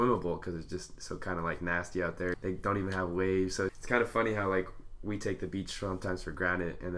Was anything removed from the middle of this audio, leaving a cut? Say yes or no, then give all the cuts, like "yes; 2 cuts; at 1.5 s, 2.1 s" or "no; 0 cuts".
yes; 2 cuts; at 2.3 s, 3.7 s